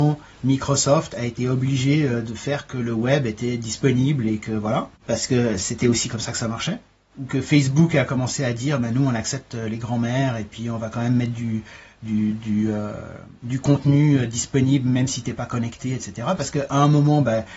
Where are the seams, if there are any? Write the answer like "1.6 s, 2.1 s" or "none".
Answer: 5.0 s